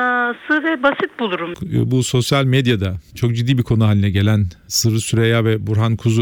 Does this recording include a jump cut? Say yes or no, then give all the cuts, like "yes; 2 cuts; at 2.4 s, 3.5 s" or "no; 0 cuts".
yes; 1 cut; at 1.5 s